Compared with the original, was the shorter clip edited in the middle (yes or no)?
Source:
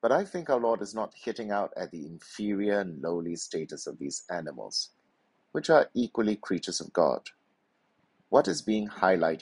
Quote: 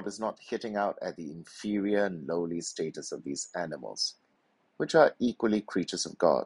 no